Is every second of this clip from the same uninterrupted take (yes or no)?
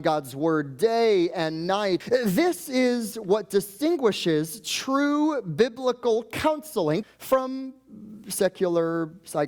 no